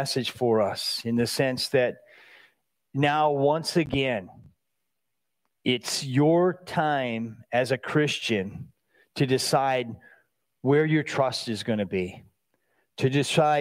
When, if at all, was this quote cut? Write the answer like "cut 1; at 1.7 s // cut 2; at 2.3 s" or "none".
none